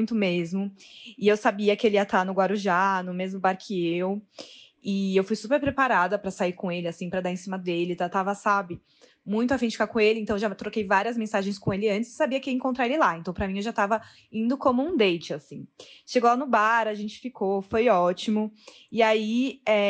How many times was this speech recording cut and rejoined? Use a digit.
0